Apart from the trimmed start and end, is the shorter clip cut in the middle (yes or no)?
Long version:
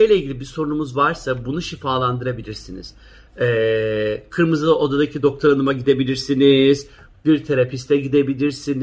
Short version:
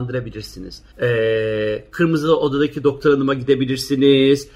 yes